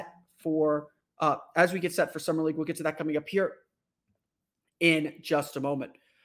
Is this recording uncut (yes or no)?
yes